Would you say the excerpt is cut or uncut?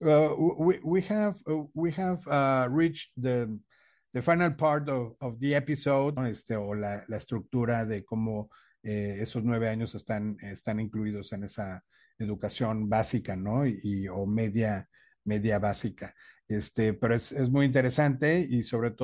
cut